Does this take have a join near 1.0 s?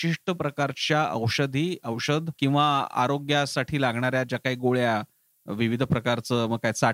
no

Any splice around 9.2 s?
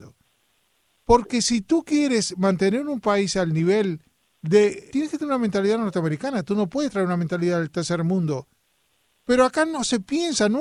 no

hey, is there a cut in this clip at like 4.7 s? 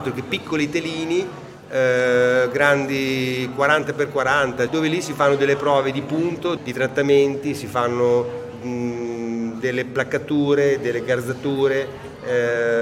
yes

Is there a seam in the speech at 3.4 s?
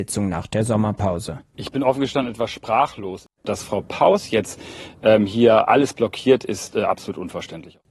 yes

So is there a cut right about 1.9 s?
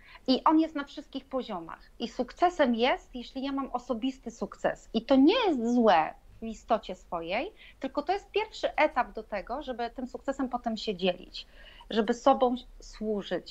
no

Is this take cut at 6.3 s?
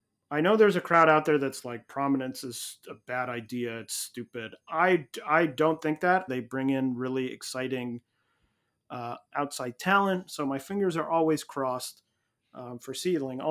yes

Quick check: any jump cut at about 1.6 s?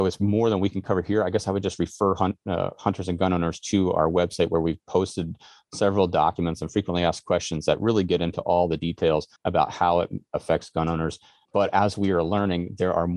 no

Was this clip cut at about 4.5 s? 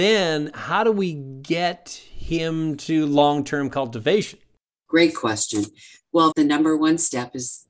no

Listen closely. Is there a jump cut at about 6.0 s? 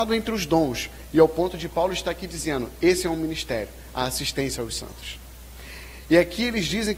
no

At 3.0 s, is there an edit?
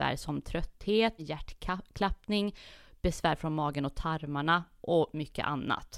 no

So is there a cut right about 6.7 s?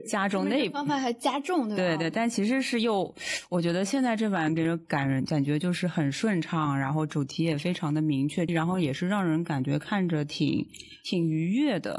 no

